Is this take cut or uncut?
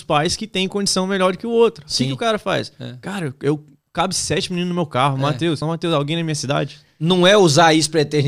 cut